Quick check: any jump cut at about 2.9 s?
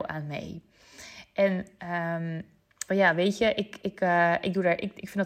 yes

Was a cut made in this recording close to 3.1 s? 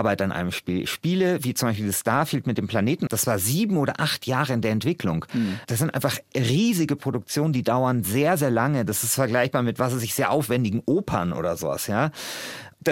yes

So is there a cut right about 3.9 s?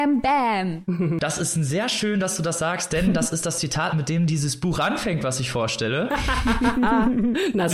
no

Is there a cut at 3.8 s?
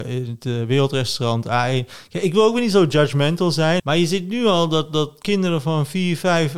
yes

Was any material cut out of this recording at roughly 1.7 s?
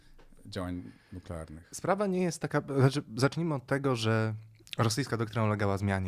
no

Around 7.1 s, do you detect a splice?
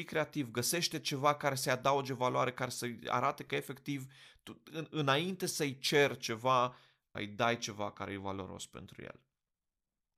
yes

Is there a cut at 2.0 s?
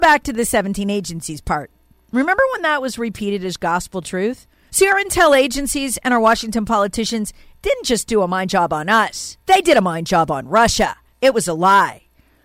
no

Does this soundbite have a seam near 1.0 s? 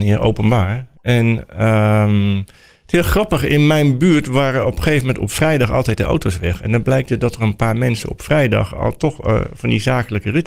yes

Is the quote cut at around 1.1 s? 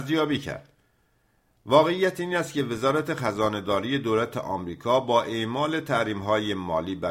no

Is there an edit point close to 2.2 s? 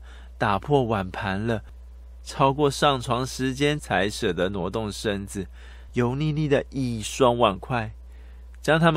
no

